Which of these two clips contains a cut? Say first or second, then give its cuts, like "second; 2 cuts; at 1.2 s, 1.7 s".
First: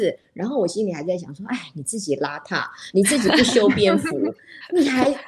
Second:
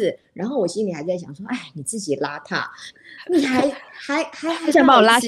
second; 1 cut; at 2.9 s